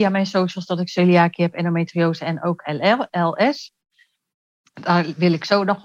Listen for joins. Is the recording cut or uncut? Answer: uncut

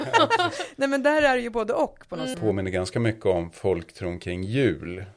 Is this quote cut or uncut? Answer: cut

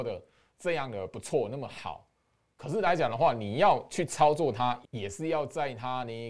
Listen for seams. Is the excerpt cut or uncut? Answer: cut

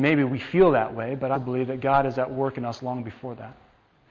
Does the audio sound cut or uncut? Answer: cut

